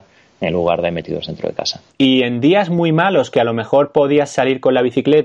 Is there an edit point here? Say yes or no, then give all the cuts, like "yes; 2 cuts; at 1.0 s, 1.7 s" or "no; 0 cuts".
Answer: yes; 1 cut; at 1.9 s